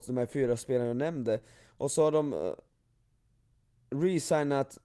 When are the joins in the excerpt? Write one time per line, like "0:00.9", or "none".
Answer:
none

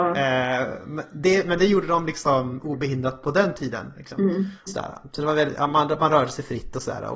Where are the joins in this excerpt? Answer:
0:04.7

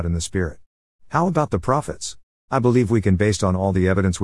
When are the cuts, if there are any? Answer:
0:00.9
0:02.5

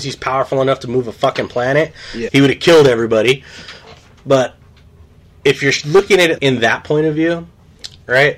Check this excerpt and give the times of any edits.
0:02.3
0:06.4

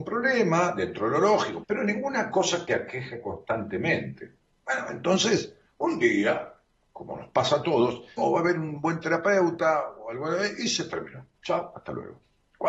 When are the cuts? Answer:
0:01.6
0:08.2

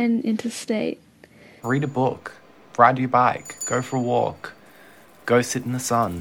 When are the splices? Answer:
0:01.6

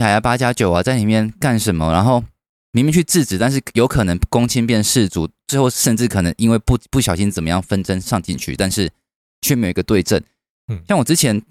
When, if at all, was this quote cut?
none

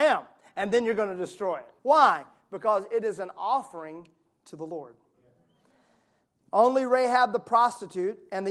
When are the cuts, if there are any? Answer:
0:01.8

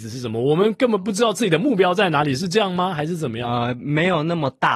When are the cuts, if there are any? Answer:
none

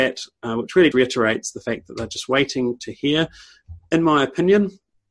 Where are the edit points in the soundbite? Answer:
0:00.9

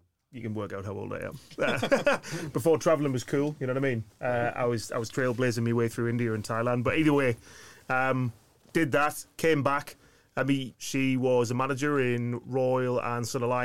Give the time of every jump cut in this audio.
0:10.7

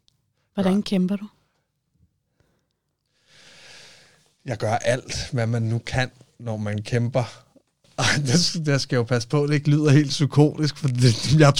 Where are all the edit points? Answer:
none

